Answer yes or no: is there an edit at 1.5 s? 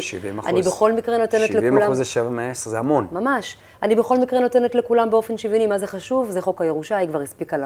no